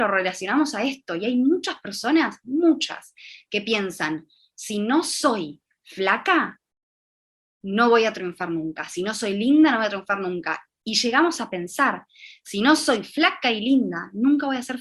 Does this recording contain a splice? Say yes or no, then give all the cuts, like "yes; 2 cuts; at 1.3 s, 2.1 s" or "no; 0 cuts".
no; 0 cuts